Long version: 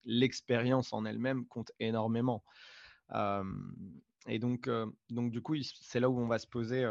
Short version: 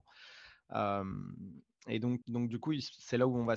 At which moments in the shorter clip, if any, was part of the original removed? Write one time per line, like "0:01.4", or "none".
0:02.2

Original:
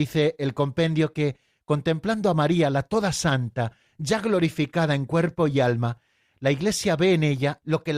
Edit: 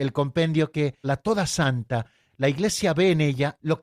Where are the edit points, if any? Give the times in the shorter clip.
0:01.0
0:02.3

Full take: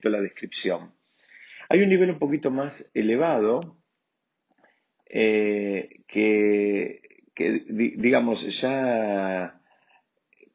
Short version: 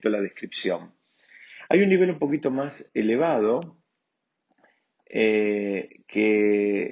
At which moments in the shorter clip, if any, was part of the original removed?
none

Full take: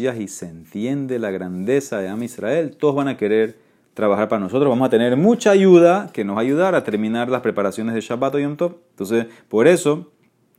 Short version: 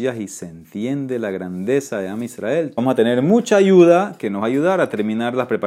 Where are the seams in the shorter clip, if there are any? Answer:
0:02.8

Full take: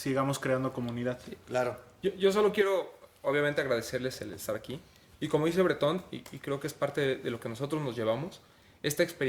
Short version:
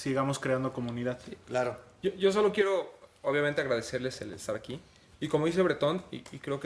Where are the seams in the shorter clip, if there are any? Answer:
none

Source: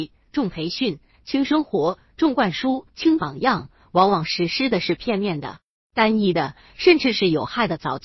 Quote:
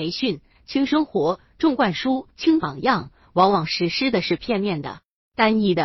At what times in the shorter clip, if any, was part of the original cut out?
none

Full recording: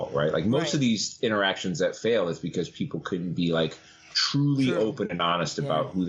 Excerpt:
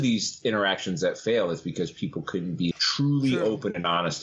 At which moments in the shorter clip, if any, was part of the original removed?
0:02.7

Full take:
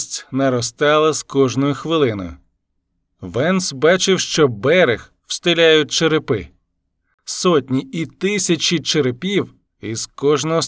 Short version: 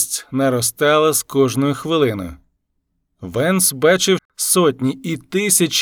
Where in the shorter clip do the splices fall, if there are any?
0:04.2

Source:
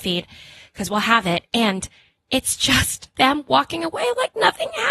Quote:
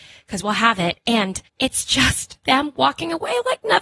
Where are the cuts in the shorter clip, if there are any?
0:01.5

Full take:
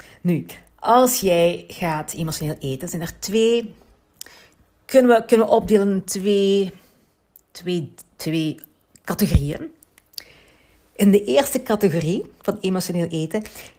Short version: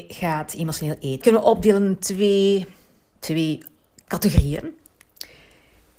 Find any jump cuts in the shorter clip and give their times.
0:01.2
0:03.2

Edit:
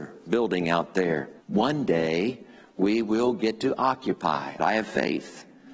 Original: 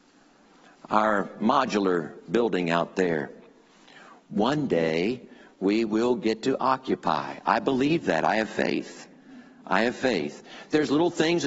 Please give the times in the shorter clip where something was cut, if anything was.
0:01.4
0:04.6

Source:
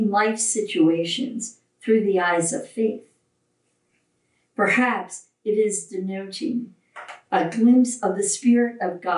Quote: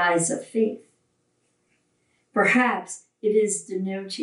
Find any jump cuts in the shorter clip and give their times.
none

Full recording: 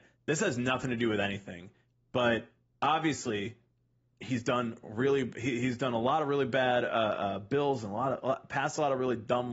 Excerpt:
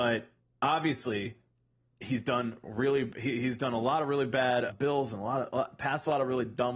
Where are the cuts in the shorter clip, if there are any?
0:04.7

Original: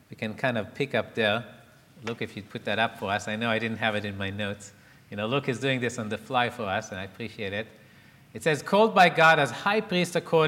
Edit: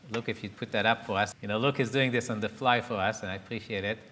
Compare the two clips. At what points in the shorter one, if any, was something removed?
0:01.3

